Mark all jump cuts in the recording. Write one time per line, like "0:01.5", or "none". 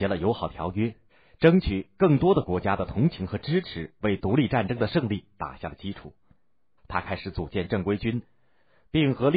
0:06.8